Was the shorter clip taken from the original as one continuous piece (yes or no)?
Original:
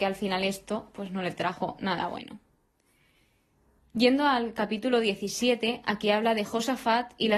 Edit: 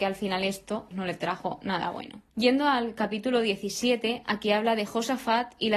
no